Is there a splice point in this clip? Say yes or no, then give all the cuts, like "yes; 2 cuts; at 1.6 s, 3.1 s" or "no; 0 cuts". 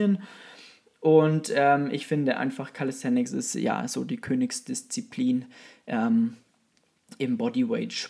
no; 0 cuts